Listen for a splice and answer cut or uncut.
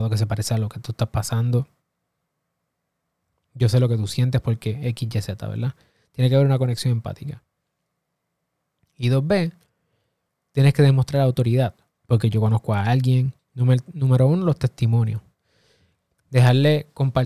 cut